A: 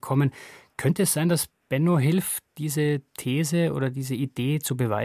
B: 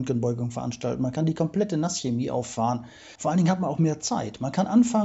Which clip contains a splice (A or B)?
B